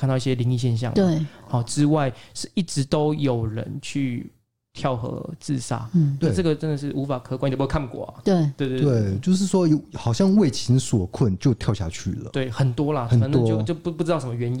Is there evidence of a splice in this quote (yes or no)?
no